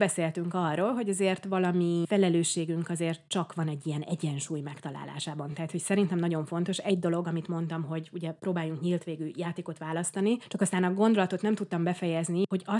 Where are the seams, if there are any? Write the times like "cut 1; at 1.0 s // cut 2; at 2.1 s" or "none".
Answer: none